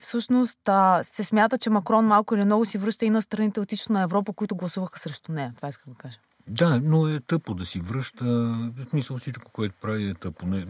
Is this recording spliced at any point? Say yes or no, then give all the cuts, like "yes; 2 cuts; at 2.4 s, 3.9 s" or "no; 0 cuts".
no; 0 cuts